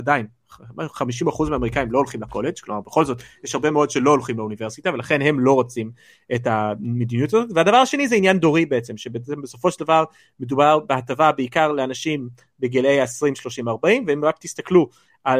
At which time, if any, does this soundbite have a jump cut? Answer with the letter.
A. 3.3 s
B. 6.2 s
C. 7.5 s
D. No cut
D